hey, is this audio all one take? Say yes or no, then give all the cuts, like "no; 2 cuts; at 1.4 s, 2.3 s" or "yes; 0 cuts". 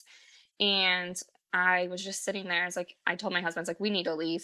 yes; 0 cuts